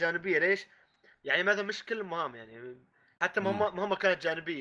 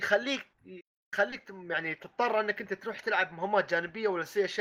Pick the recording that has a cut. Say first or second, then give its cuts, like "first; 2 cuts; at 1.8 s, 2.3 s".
first; 1 cut; at 1.1 s